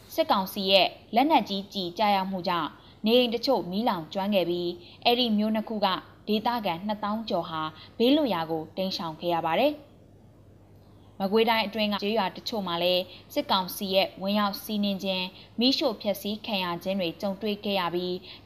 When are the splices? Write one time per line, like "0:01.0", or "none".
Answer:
0:12.0